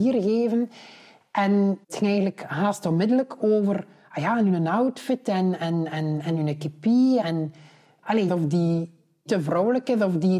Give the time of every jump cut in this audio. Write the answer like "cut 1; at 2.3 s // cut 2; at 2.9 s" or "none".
cut 1; at 1.8 s // cut 2; at 7.2 s // cut 3; at 8.3 s